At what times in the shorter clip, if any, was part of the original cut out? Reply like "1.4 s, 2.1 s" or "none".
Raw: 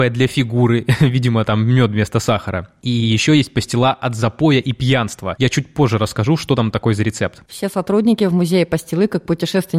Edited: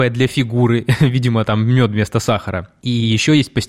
none